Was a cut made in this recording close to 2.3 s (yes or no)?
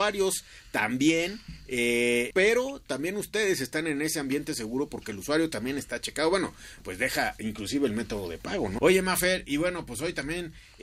yes